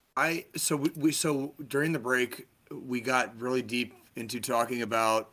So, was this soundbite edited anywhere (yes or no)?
no